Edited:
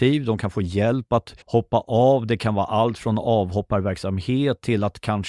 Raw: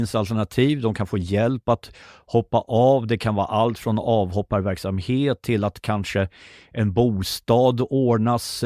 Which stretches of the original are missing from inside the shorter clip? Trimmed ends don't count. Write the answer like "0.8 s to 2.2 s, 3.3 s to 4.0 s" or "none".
2.0 s to 2.2 s